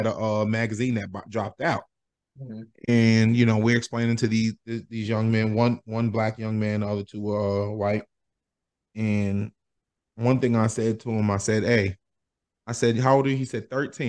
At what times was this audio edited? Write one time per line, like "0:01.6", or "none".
none